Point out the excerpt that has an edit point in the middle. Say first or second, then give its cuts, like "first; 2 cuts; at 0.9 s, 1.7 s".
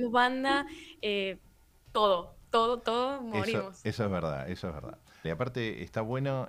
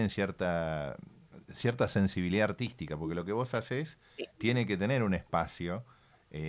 first; 1 cut; at 5.2 s